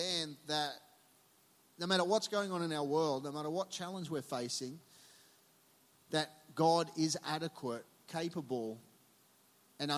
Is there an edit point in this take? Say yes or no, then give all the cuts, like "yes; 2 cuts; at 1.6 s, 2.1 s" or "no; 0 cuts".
no; 0 cuts